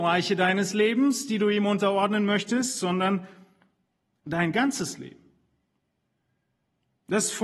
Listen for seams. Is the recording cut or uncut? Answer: uncut